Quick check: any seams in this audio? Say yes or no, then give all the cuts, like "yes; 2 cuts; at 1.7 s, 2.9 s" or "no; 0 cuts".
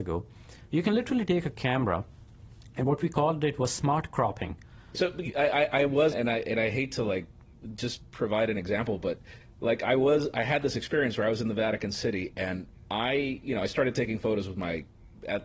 yes; 2 cuts; at 4.9 s, 6.1 s